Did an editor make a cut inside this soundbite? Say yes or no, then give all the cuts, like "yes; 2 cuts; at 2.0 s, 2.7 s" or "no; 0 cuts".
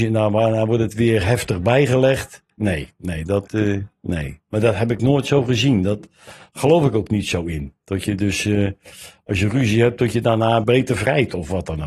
yes; 1 cut; at 10.6 s